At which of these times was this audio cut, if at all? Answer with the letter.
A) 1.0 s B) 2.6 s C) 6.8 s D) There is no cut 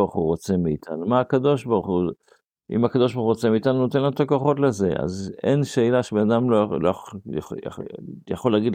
D